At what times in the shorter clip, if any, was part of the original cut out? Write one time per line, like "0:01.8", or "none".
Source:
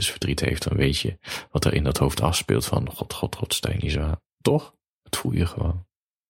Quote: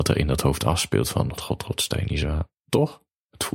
0:01.4